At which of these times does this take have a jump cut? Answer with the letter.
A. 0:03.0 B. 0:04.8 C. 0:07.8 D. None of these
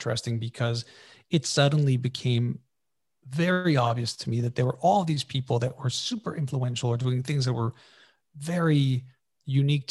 D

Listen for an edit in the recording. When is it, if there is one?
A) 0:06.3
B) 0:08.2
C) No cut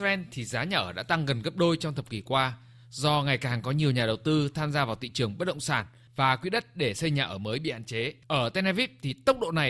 B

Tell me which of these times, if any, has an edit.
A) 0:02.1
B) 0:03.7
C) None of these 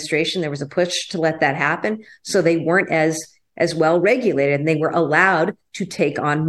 C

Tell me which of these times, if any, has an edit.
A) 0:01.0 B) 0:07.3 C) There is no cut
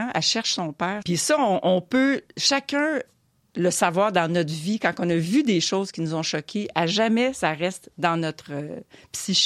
A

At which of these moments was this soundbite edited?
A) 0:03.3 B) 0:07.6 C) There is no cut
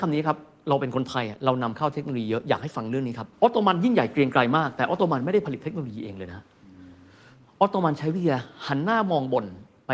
A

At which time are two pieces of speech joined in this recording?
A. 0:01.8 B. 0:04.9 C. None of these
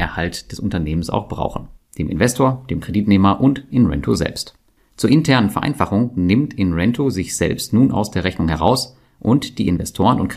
A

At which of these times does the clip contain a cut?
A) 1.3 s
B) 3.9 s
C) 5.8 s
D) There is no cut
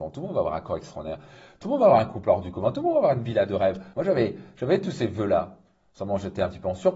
B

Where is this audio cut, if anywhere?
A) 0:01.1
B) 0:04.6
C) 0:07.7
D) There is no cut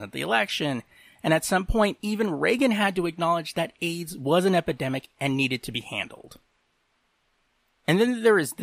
D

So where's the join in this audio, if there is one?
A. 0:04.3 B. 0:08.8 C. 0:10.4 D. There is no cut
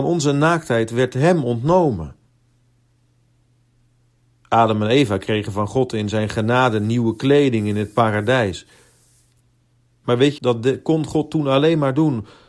C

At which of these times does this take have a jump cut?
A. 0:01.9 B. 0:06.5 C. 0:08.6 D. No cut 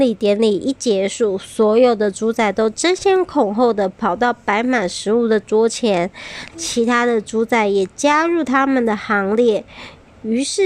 B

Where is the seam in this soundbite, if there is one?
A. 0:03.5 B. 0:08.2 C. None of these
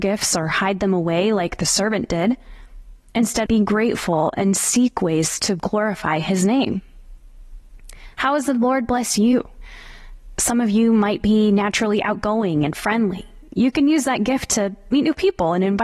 A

